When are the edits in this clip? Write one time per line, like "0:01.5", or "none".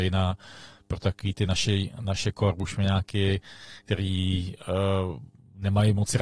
none